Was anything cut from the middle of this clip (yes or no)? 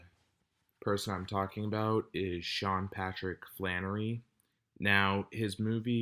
yes